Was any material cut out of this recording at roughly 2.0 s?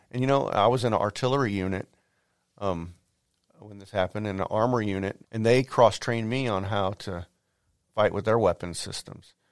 no; 1 cut; at 5.2 s

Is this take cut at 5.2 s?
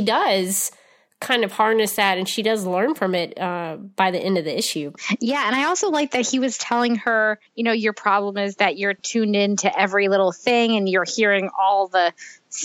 no; 2 cuts; at 7.5 s, 9.0 s

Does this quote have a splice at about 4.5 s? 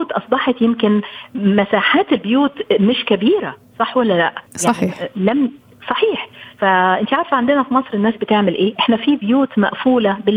yes; 1 cut; at 4.5 s

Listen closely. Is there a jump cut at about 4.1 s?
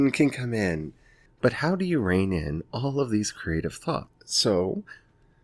yes; 2 cuts; at 1.3 s, 4.1 s

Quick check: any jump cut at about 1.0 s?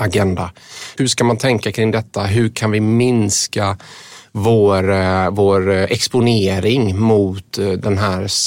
yes; 1 cut; at 1.0 s

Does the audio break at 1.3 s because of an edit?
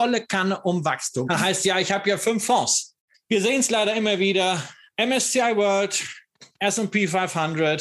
yes; 2 cuts; at 1.3 s, 3.1 s

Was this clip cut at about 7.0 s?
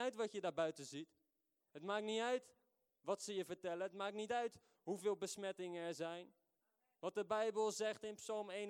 no; 0 cuts

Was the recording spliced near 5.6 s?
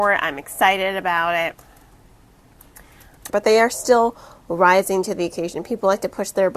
no; 1 cut; at 3.3 s

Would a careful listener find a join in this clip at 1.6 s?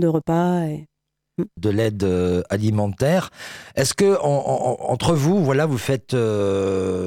yes; 1 cut; at 1.6 s

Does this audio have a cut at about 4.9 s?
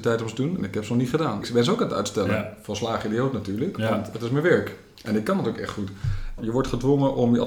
no; 2 cuts; at 1.4 s, 6.4 s

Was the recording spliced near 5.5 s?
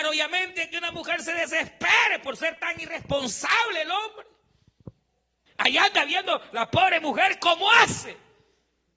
yes; 1 cut; at 5.5 s

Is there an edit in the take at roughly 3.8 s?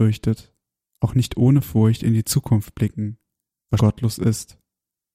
yes; 1 cut; at 3.8 s

